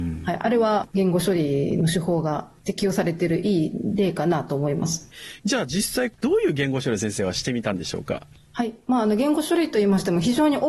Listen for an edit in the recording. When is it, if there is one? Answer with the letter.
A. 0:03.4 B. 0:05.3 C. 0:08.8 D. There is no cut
D